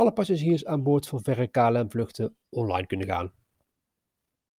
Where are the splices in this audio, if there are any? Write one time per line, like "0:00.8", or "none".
none